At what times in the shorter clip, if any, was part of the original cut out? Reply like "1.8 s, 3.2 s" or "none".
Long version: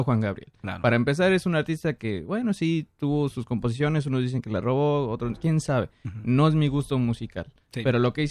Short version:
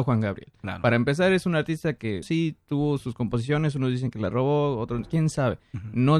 2.2 s